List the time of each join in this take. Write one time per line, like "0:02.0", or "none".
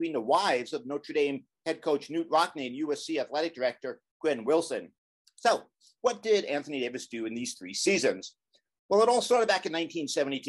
none